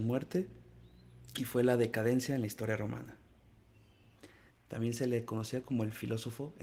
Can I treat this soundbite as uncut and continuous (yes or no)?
no